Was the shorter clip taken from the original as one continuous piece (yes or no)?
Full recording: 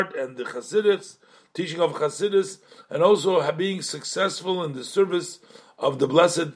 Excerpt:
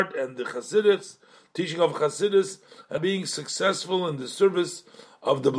no